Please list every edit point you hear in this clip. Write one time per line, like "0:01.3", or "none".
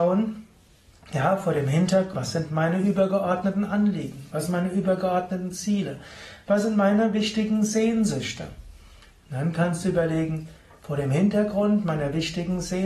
0:02.1